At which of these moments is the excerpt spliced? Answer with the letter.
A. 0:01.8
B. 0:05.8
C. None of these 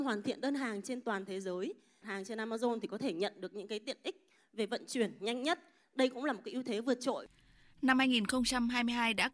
C